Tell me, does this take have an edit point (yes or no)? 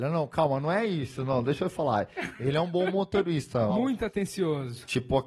yes